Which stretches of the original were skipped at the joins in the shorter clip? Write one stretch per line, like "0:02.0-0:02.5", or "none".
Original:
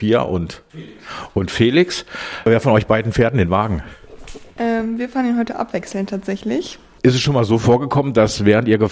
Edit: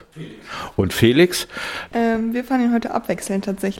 0:02.4-0:04.5